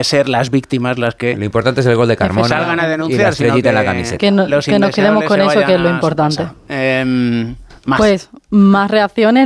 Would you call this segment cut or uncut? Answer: uncut